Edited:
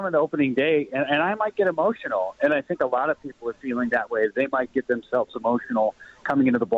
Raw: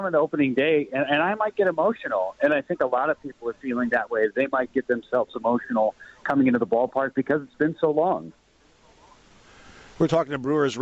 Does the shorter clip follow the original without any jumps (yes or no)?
yes